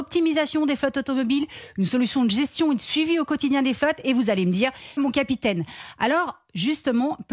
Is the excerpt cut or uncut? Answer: cut